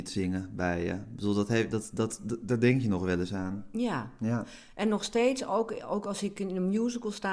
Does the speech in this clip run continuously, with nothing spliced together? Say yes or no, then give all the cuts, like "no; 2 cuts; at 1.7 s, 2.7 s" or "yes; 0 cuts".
yes; 0 cuts